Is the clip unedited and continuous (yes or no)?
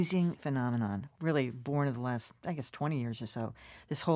yes